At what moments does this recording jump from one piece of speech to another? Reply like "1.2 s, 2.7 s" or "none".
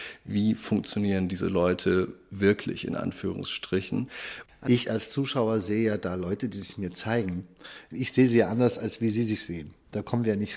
4.5 s